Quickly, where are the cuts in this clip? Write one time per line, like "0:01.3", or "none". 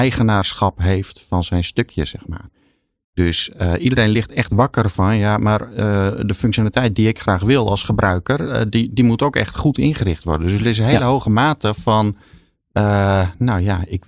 none